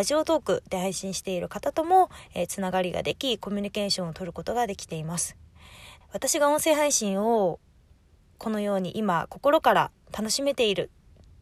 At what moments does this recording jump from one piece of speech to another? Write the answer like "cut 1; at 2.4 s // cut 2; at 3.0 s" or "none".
cut 1; at 6.0 s